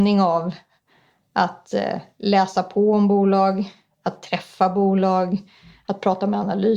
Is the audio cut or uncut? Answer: uncut